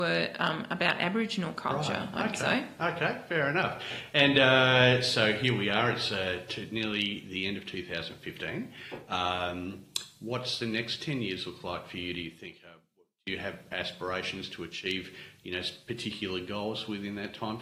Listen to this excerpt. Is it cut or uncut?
uncut